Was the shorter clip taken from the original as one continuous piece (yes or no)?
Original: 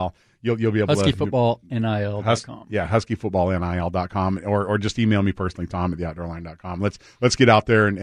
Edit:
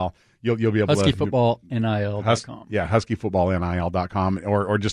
yes